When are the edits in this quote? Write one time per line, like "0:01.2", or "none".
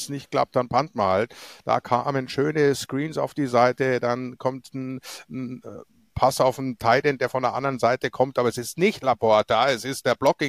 none